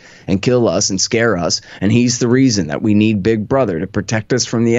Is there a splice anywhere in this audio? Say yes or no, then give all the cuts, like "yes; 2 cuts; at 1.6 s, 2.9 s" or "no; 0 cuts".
no; 0 cuts